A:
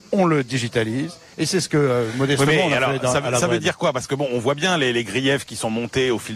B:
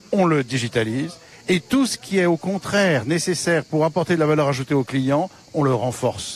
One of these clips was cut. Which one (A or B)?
A